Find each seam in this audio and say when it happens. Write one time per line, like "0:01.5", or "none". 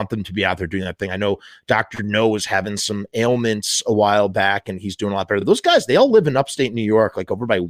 none